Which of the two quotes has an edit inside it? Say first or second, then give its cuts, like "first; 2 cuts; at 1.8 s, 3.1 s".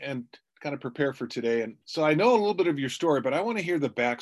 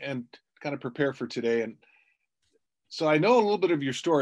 first; 1 cut; at 1.8 s